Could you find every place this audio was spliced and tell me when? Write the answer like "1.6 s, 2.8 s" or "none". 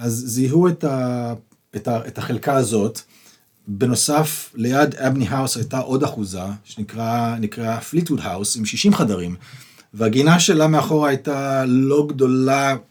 none